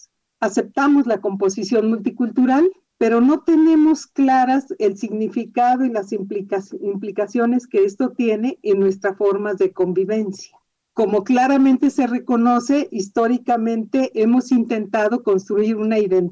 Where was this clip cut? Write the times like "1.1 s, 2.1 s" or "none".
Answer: none